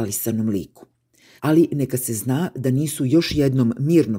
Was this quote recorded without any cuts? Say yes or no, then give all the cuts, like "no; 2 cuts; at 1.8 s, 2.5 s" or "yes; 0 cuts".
no; 1 cut; at 1.4 s